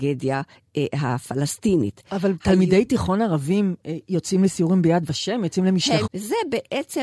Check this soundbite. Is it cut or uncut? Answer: cut